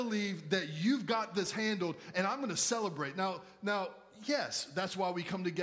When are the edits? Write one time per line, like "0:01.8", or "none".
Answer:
none